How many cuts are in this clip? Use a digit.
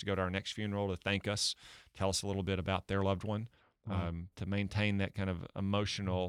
1